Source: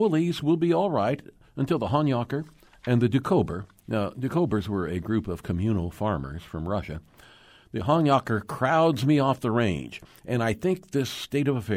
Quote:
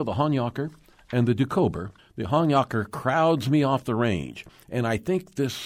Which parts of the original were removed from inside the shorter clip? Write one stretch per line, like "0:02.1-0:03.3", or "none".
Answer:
0:03.7-0:07.5